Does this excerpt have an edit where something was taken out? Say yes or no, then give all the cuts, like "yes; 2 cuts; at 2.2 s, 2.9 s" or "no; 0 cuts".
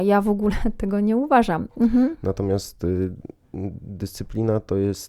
yes; 1 cut; at 1.7 s